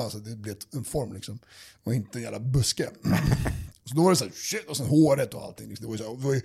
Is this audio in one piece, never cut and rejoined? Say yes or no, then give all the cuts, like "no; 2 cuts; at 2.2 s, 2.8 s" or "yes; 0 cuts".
yes; 0 cuts